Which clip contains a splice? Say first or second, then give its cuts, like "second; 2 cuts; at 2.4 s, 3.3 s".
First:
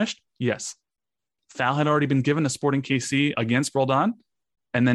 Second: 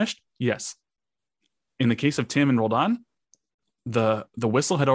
first; 2 cuts; at 1.4 s, 3.3 s